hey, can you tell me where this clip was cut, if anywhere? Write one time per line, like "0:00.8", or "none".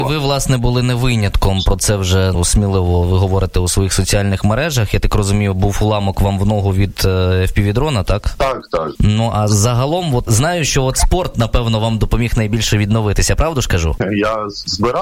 none